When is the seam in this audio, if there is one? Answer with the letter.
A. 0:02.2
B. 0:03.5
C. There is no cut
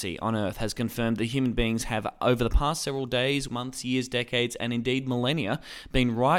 B